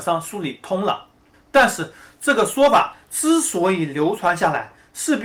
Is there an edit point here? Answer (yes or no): no